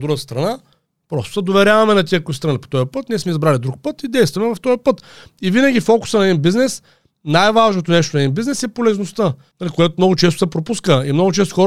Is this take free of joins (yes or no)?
yes